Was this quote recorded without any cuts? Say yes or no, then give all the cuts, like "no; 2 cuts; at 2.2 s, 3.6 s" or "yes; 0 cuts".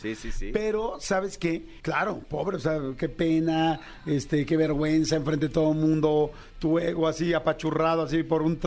no; 1 cut; at 1.8 s